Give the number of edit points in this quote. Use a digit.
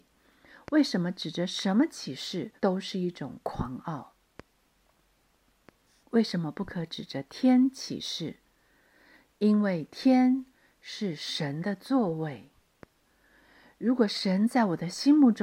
1